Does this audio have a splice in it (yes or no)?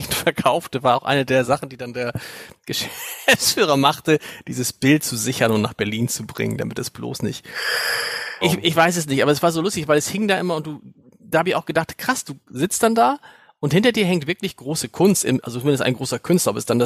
yes